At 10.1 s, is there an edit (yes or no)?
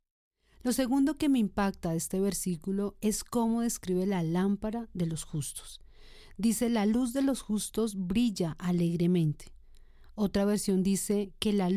no